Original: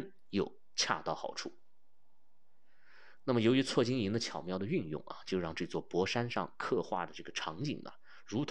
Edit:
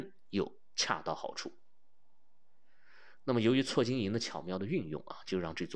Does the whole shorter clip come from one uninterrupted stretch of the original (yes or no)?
yes